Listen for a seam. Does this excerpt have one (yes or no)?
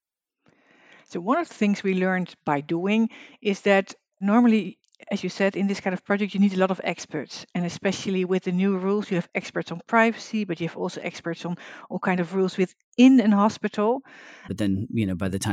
yes